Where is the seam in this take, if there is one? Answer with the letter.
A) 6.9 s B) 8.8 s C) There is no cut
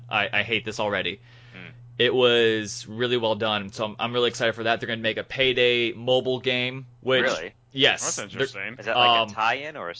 A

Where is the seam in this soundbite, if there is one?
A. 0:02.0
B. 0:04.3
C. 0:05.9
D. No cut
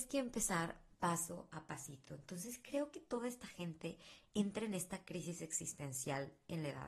D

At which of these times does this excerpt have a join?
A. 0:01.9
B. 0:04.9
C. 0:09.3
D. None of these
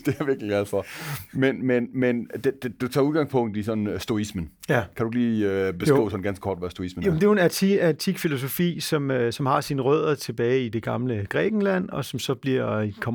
D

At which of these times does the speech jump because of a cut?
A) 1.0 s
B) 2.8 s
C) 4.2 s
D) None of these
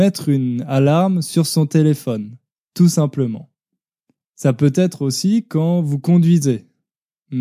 C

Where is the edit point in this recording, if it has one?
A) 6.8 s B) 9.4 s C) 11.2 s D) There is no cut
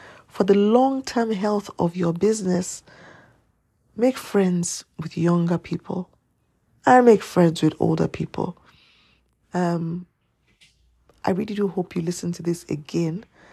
B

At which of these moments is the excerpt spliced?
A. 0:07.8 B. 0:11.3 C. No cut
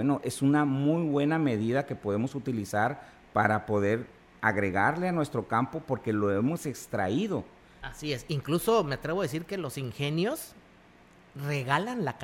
A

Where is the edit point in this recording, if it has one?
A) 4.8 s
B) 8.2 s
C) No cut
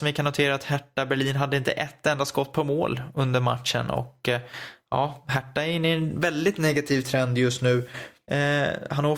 B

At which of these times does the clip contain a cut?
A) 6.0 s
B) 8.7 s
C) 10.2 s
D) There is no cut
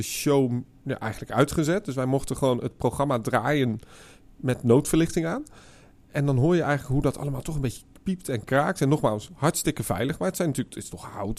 D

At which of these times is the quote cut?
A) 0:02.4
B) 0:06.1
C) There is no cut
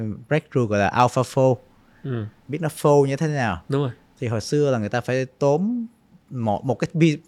A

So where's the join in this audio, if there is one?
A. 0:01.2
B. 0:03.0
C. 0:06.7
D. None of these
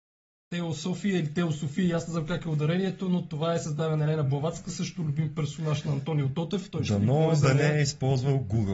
D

